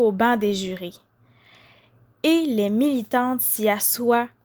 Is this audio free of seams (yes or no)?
yes